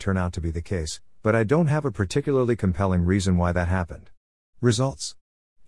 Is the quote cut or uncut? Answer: uncut